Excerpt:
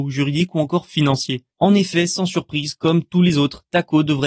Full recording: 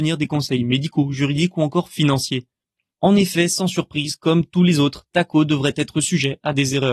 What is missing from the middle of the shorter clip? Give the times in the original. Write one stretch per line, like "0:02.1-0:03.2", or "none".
0:02.5-0:02.9